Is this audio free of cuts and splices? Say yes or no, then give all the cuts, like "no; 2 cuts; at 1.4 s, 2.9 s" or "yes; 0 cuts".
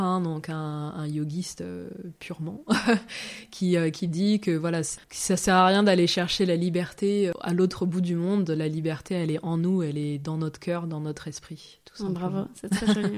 no; 1 cut; at 5.0 s